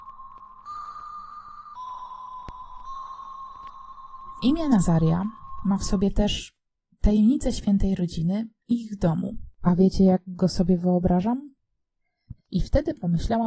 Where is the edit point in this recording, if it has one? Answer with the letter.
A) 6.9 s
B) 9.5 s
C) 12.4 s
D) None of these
C